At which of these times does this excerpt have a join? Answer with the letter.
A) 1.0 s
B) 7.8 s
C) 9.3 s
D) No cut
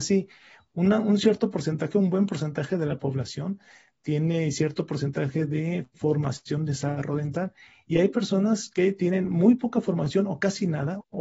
D